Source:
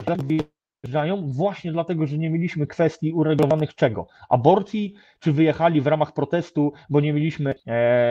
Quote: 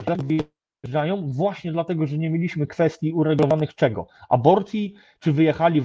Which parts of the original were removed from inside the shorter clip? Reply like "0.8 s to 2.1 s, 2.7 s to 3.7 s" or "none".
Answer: none